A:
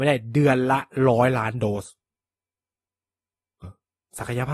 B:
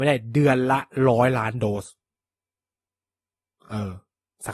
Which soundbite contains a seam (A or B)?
A